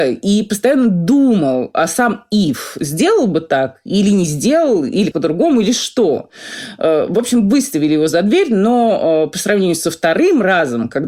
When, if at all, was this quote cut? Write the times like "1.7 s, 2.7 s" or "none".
5.1 s